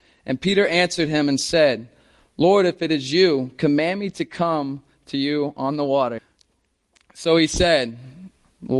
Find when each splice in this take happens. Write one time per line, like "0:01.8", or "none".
0:06.2